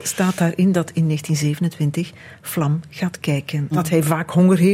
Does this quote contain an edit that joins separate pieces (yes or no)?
yes